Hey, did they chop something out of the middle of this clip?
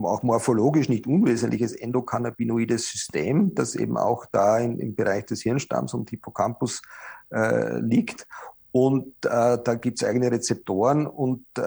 no; 0 cuts

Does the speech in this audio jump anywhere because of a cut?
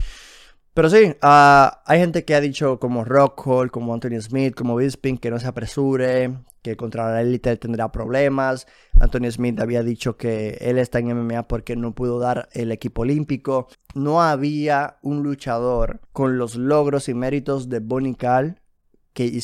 yes; 2 cuts; at 13.7 s, 16.0 s

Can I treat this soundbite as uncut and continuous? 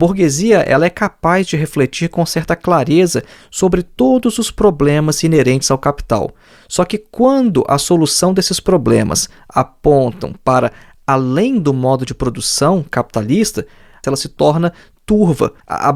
no; 1 cut; at 14.0 s

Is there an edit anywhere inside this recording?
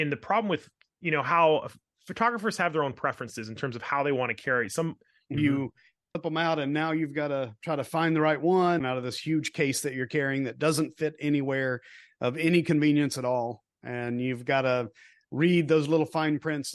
yes; 1 cut; at 5.4 s

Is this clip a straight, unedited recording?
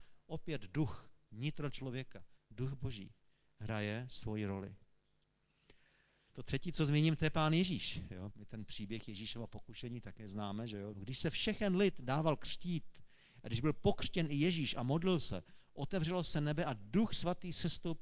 no; 3 cuts; at 6.3 s, 8.3 s, 10.9 s

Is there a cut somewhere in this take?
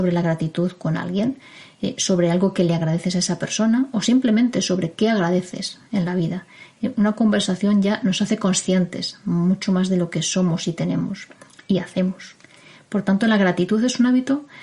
no; 0 cuts

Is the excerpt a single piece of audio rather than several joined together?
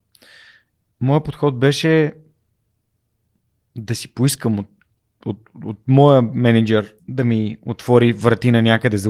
no; 1 cut; at 7.0 s

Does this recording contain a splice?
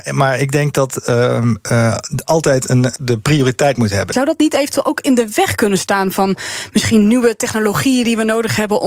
yes; 2 cuts; at 3.0 s, 4.1 s

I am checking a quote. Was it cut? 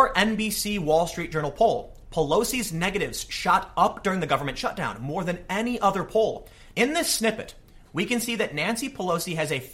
yes; 2 cuts; at 6.7 s, 7.8 s

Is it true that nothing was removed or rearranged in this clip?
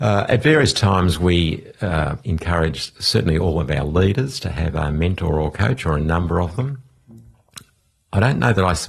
no; 1 cut; at 2.2 s

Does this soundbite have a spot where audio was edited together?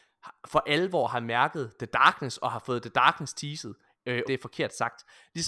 yes; 1 cut; at 4.2 s

